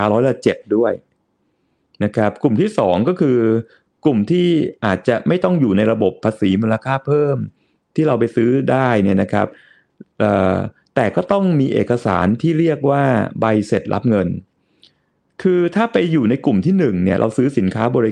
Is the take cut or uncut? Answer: uncut